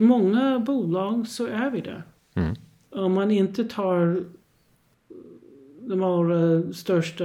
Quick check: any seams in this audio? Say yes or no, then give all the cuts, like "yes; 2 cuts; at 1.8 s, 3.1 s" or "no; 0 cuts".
no; 0 cuts